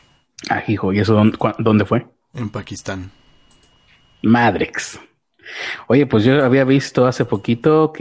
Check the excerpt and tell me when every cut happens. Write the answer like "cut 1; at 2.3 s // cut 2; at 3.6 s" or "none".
none

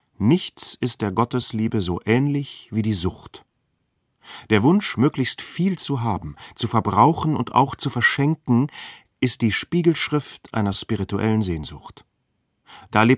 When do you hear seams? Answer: none

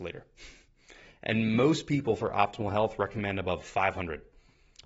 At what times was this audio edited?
none

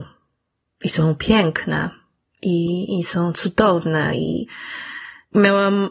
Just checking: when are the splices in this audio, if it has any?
none

